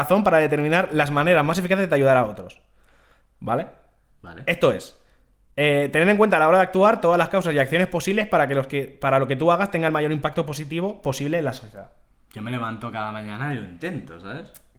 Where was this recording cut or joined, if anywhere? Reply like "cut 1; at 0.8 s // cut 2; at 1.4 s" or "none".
none